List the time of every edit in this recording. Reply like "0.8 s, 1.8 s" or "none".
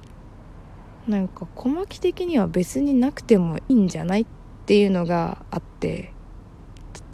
3.7 s